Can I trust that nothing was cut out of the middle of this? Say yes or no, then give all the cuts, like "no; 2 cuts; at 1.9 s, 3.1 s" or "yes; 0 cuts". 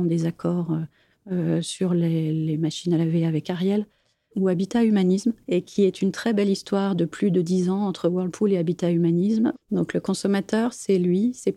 no; 2 cuts; at 5.4 s, 9.5 s